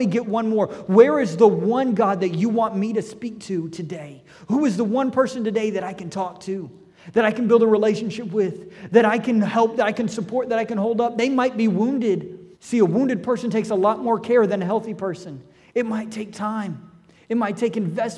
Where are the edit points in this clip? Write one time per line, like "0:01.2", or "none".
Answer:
0:12.5